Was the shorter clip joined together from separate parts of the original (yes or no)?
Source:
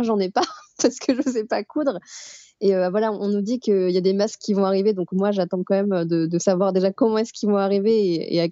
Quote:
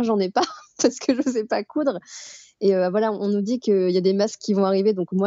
no